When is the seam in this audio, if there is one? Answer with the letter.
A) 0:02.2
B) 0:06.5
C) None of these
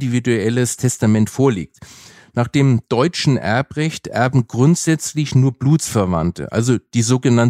C